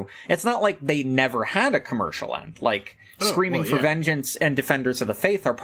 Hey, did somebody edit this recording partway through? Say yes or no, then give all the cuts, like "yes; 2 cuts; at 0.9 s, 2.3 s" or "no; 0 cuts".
no; 0 cuts